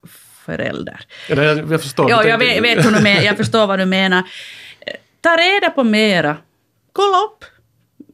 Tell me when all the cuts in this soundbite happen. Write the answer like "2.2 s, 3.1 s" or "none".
none